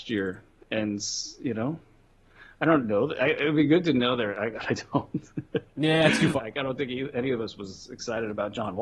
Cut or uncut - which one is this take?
cut